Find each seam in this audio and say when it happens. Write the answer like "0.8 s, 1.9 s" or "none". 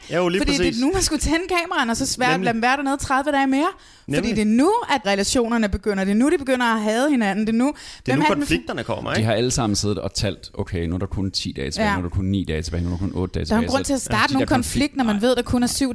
5.0 s